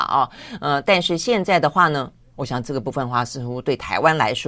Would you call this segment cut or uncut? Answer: cut